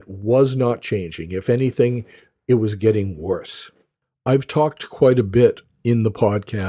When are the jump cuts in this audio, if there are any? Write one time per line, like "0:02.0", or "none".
none